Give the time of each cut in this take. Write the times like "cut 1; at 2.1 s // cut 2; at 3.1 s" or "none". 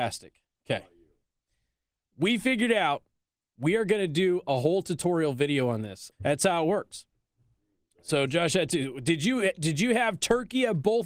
cut 1; at 6.1 s